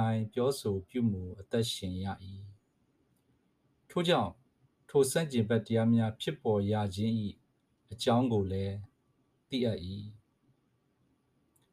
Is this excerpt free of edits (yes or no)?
yes